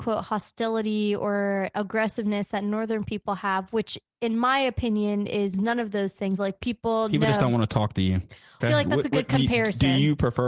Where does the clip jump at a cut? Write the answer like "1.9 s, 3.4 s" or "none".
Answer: 6.4 s, 8.6 s